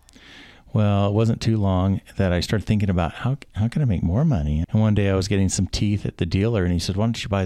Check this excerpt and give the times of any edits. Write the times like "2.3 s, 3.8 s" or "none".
4.6 s